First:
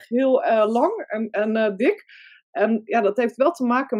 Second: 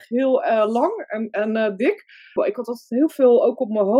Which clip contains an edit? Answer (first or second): second